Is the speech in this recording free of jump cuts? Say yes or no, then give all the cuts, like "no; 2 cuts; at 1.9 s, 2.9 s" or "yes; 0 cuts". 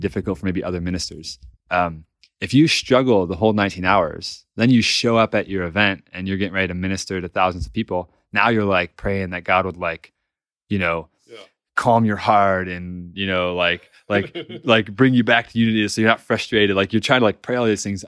no; 1 cut; at 1.5 s